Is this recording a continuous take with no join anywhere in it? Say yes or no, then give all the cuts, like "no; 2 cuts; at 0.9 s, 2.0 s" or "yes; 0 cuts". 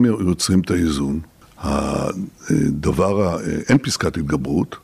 no; 1 cut; at 1.4 s